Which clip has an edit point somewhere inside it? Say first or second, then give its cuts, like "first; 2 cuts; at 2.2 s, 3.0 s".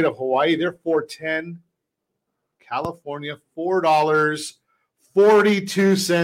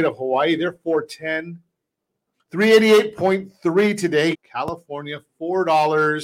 second; 2 cuts; at 2.3 s, 4.3 s